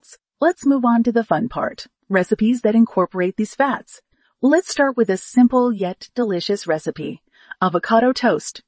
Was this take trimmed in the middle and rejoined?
no; 0 cuts

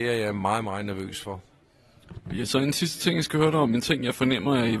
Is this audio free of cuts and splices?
yes; 0 cuts

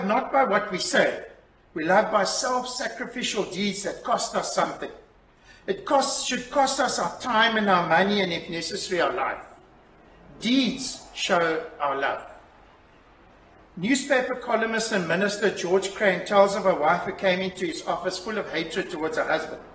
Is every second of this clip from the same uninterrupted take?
yes; 0 cuts

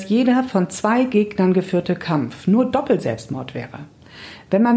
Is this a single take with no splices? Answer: yes; 0 cuts

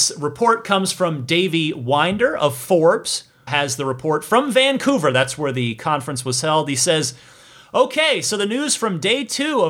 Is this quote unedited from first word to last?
no; 1 cut; at 3.5 s

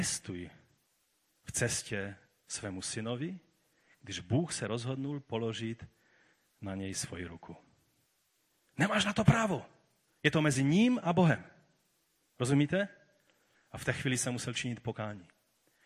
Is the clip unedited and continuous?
yes; 0 cuts

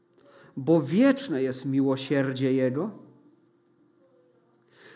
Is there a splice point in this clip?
no; 0 cuts

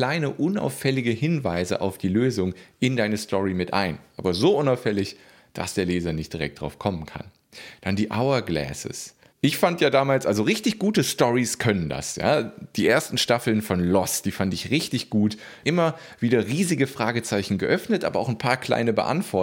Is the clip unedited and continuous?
no; 2 cuts; at 9.3 s, 15.6 s

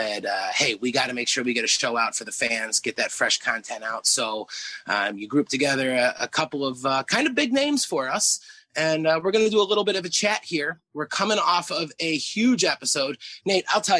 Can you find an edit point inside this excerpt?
no; 0 cuts

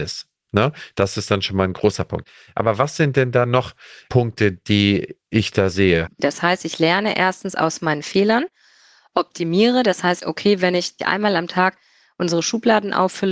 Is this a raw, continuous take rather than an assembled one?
no; 2 cuts; at 6.2 s, 10.2 s

